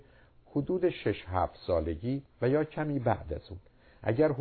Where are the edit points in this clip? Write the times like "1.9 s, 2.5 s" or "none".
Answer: 2.3 s